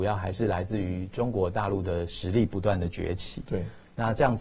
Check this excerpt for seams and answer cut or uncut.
uncut